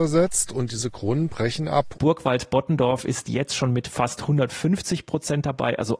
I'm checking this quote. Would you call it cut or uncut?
cut